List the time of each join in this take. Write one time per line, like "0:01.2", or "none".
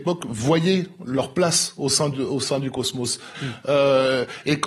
0:03.3